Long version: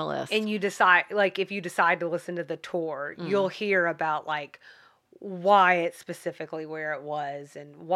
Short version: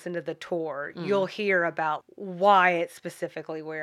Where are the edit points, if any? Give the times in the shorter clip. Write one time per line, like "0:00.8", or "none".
0:02.0